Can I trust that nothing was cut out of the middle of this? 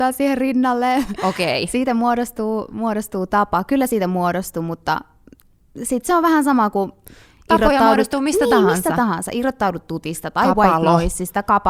yes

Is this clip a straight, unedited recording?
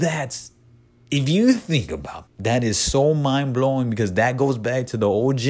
no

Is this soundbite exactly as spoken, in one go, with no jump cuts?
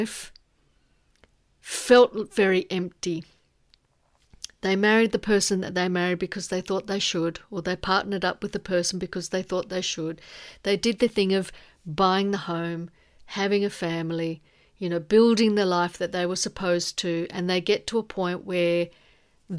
yes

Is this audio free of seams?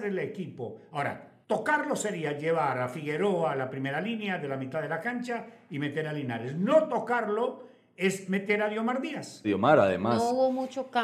no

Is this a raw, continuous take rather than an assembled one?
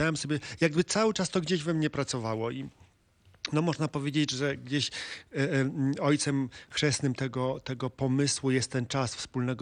yes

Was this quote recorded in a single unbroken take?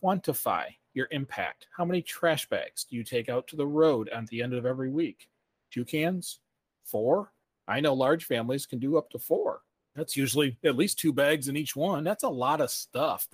yes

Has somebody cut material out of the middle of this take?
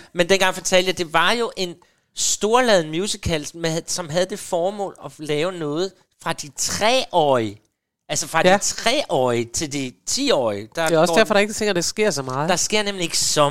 no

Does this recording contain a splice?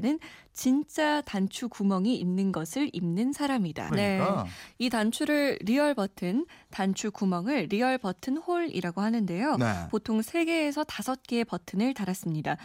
yes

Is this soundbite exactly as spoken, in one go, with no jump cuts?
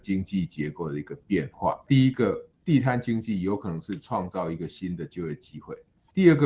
yes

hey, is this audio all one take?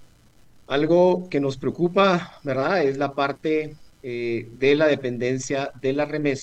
yes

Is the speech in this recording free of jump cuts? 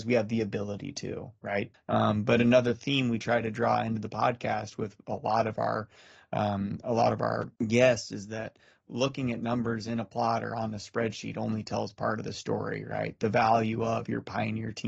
no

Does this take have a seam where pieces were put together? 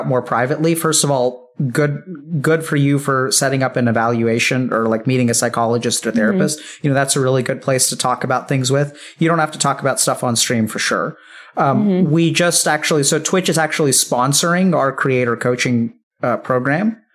no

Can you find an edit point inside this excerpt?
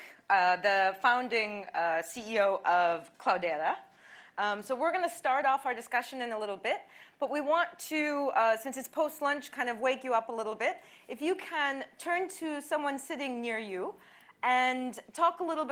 no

